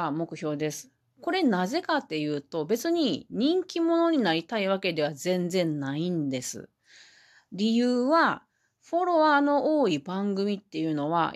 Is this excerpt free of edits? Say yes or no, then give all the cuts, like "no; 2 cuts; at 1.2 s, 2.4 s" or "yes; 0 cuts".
yes; 0 cuts